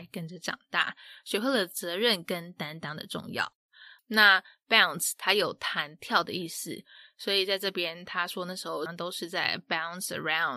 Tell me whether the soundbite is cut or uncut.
cut